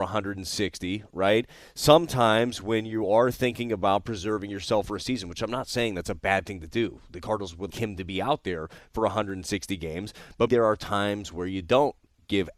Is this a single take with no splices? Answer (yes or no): no